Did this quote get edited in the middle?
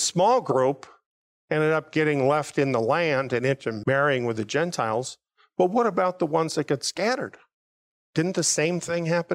no; 0 cuts

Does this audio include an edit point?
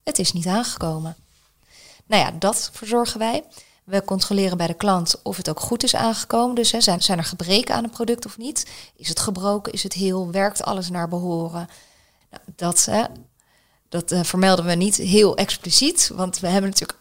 yes; 2 cuts; at 7.0 s, 12.2 s

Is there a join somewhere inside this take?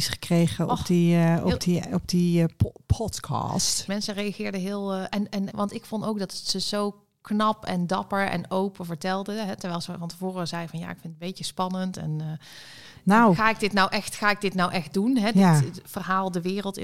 yes; 2 cuts; at 3.9 s, 5.5 s

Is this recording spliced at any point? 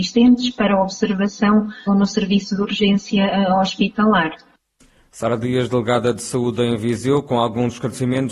yes; 1 cut; at 1.9 s

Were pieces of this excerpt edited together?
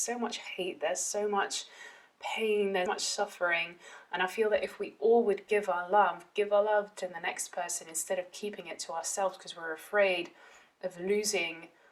yes; 1 cut; at 2.9 s

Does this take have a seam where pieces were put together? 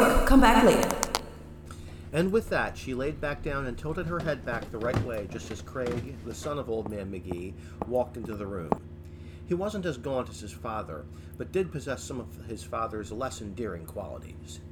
no; 0 cuts

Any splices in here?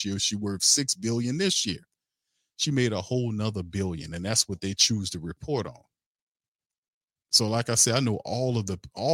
no; 0 cuts

